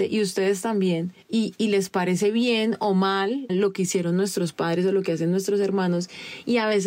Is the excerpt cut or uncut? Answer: cut